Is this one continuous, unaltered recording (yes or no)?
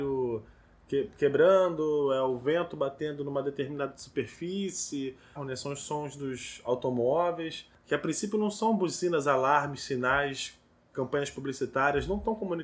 no